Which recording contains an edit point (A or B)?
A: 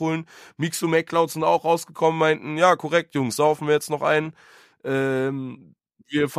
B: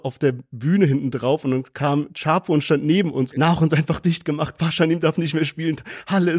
B